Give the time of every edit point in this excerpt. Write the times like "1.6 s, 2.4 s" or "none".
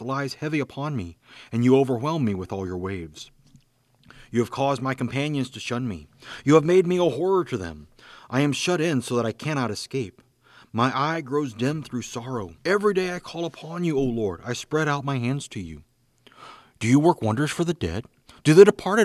12.6 s